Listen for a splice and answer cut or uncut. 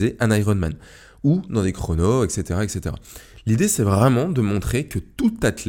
uncut